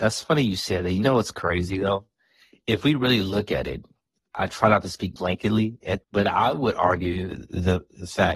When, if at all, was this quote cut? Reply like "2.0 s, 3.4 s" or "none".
6.0 s